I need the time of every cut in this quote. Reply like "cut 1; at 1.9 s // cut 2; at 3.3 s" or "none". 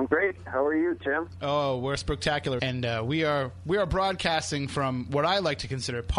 cut 1; at 2.6 s